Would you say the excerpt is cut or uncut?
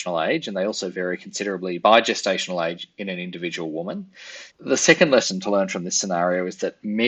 cut